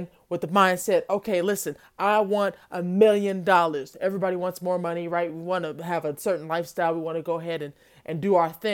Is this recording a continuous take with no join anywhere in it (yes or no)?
yes